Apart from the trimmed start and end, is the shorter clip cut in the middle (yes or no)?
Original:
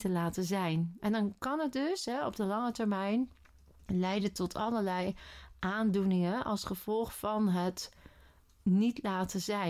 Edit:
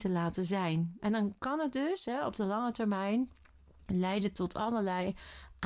no